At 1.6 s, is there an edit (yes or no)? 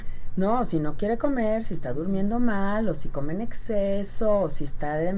no